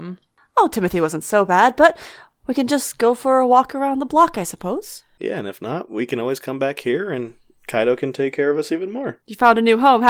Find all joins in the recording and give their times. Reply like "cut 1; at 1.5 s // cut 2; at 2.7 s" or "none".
none